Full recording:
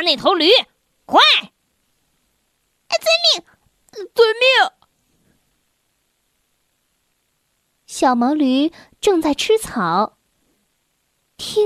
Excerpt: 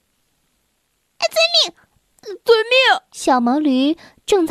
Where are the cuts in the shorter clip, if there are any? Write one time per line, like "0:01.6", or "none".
0:03.1